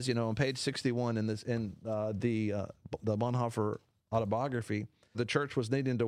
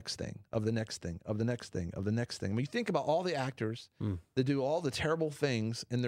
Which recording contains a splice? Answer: first; 1 cut; at 5.1 s

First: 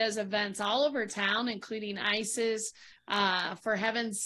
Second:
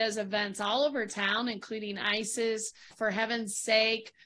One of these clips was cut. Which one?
second; 1 cut; at 2.9 s

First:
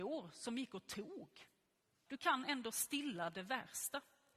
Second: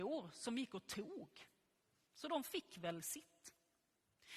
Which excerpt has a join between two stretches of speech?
first; 1 cut; at 2.1 s

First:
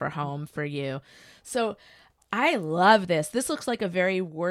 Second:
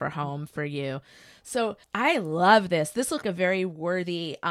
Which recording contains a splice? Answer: second; 2 cuts; at 1.8 s, 3.2 s

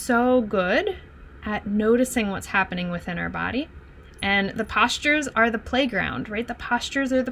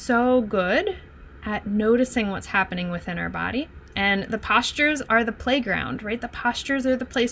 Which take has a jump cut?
second; 1 cut; at 3.9 s

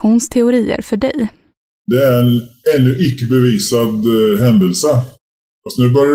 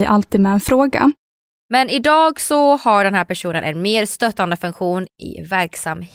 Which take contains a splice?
second; 1 cut; at 1.6 s

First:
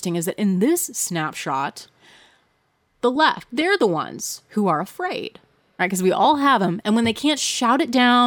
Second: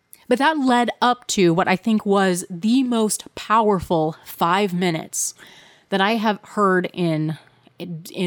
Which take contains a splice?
first; 2 cuts; at 5.8 s, 6.8 s

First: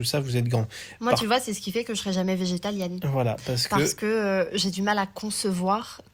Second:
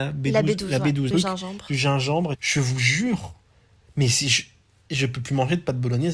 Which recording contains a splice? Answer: second; 2 cuts; at 1.1 s, 2.3 s

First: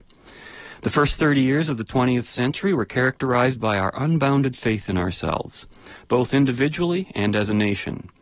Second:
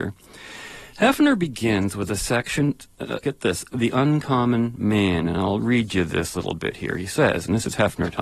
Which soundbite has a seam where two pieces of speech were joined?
second; 1 cut; at 3.2 s

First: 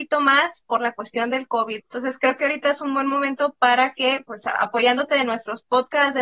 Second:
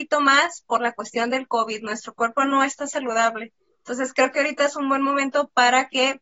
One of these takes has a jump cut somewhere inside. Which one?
first; 1 cut; at 1.8 s

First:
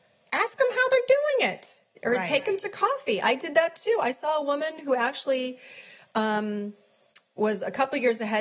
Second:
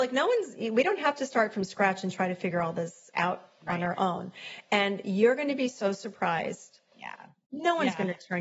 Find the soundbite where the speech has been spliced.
second; 1 cut; at 6.9 s

